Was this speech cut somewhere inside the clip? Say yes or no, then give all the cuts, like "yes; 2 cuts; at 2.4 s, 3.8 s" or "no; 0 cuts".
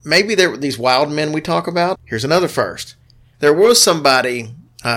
yes; 2 cuts; at 1.9 s, 3.3 s